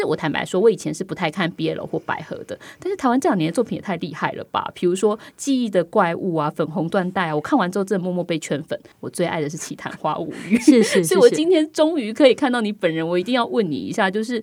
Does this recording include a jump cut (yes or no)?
yes